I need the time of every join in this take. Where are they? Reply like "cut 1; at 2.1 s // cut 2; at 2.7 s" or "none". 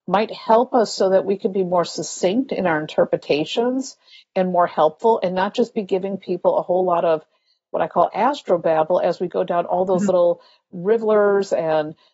none